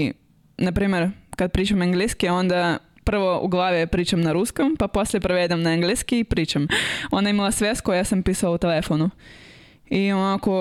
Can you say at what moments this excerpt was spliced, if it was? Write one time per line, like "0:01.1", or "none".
0:06.6